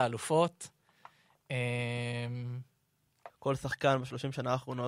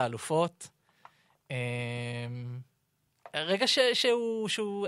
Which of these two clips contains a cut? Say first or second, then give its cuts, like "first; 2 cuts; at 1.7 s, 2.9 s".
first; 1 cut; at 3.3 s